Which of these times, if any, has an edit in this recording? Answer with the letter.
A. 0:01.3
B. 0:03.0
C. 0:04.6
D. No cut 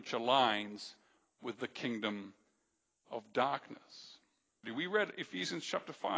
C